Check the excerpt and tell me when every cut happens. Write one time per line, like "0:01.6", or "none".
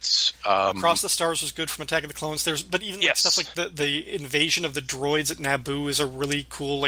none